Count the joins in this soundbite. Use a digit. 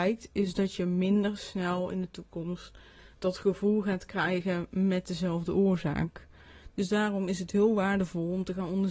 0